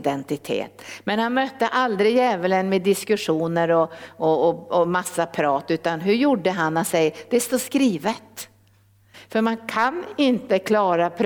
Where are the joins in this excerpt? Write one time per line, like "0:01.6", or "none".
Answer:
0:09.1